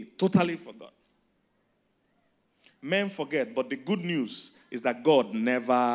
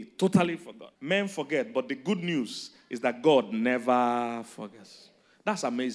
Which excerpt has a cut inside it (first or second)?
second